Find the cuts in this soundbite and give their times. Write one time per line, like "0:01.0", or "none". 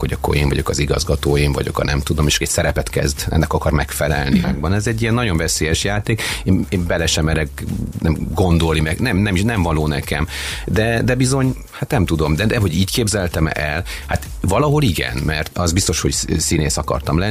0:04.4